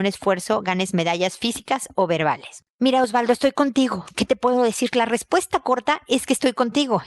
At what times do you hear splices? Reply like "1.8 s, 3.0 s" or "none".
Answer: none